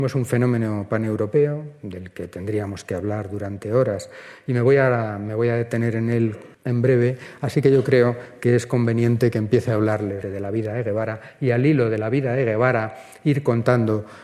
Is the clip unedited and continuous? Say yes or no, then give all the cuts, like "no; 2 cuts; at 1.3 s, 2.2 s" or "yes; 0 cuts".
no; 2 cuts; at 6.5 s, 10.2 s